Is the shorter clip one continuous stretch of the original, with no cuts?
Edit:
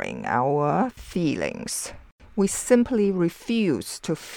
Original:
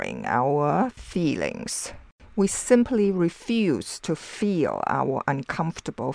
yes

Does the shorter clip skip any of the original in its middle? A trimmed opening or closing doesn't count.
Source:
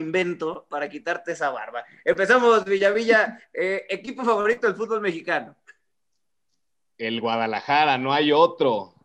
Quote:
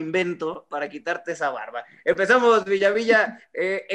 no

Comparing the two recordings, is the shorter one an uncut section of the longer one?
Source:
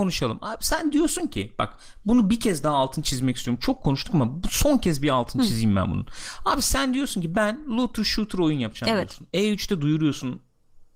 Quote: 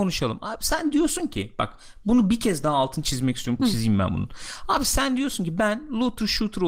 no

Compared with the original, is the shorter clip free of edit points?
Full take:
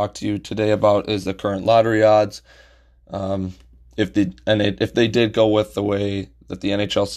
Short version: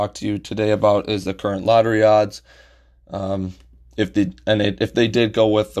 yes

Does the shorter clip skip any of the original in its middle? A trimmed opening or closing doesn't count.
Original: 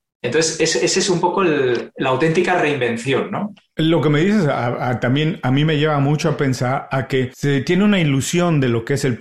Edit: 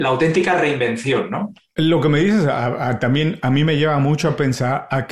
no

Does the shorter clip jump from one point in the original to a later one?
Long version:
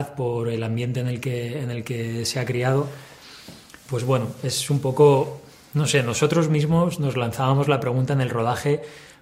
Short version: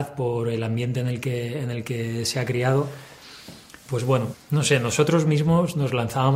yes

